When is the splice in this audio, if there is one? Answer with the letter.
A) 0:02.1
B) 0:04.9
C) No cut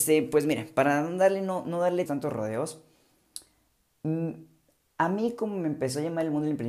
A